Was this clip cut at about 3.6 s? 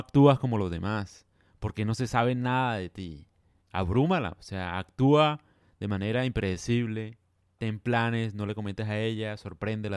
yes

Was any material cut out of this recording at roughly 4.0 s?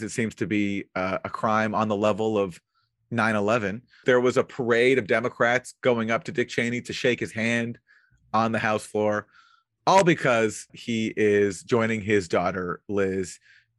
yes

